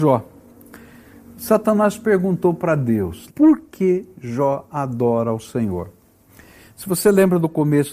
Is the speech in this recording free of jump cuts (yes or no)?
no